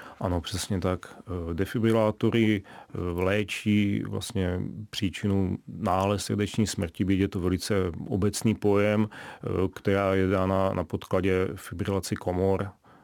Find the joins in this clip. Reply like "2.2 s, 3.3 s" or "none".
none